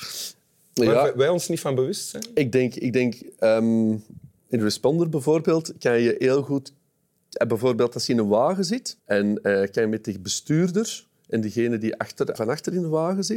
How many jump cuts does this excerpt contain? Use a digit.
2